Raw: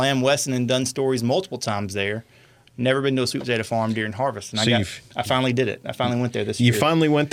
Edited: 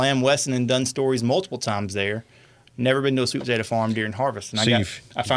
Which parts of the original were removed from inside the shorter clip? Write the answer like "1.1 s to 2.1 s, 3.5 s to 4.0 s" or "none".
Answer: none